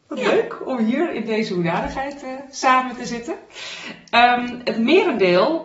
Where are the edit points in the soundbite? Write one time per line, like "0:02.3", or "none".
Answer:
none